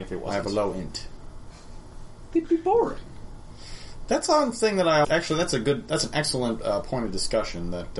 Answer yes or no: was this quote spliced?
yes